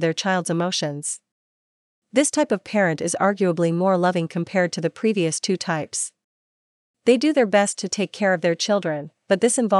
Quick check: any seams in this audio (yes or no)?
no